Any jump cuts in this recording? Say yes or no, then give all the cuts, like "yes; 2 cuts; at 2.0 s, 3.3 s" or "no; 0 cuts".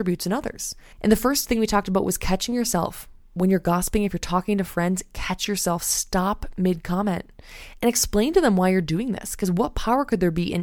yes; 1 cut; at 0.9 s